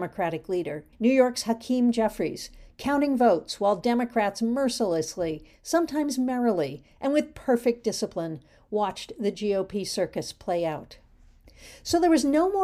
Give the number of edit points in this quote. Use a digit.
1